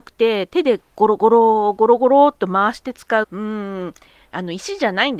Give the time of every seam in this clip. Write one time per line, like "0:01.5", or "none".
0:03.2